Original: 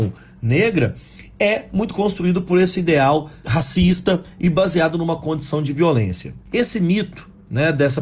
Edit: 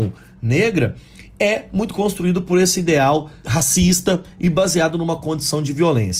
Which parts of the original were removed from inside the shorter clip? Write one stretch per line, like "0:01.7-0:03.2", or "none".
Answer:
none